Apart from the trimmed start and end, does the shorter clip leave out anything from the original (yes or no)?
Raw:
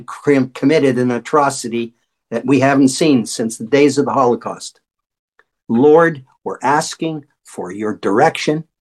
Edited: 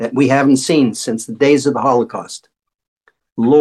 no